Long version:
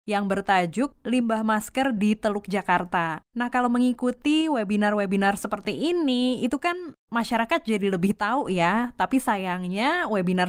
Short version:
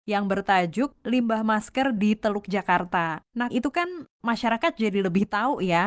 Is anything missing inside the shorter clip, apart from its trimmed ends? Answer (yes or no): yes